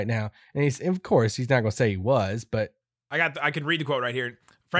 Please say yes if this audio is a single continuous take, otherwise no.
yes